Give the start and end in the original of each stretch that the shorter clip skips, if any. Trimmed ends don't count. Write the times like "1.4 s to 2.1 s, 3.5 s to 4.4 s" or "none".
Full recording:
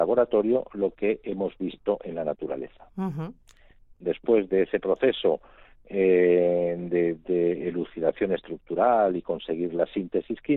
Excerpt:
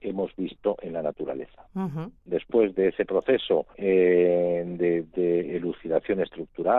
3.4 s to 3.9 s, 5.5 s to 5.9 s